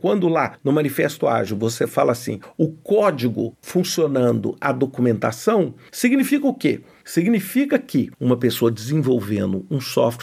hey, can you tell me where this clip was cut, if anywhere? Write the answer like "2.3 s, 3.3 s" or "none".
none